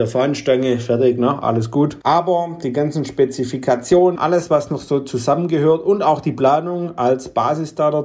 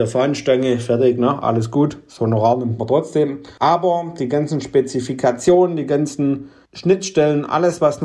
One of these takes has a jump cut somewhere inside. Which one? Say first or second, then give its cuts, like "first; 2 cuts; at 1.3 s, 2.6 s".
first; 2 cuts; at 2.0 s, 4.2 s